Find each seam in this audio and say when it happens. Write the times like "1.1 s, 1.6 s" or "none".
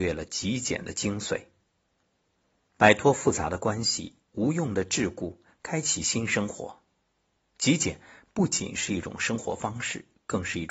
2.7 s